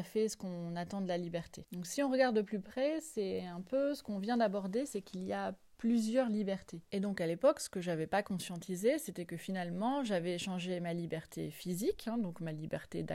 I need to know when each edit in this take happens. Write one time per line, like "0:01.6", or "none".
0:06.8